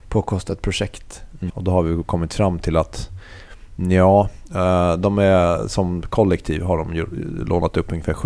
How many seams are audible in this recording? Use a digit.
1